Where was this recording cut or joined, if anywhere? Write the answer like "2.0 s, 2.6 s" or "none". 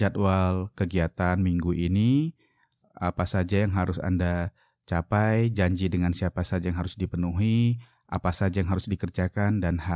none